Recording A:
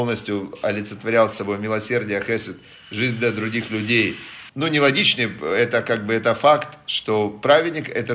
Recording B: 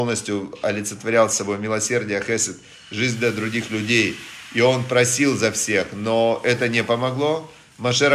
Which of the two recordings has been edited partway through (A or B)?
A